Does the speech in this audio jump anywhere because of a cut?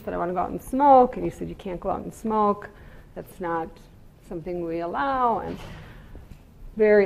no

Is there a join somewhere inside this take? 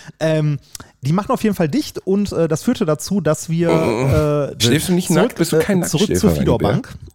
yes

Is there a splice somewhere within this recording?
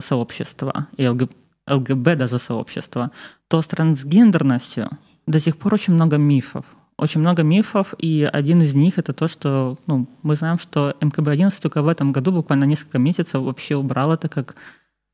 no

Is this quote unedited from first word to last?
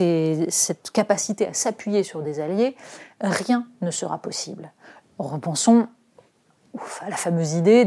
no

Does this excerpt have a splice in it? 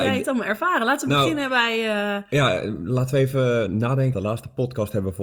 yes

